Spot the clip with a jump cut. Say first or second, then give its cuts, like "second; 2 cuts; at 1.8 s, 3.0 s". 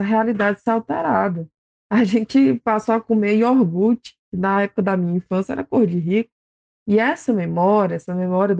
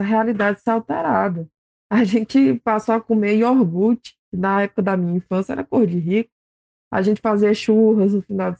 first; 1 cut; at 6.7 s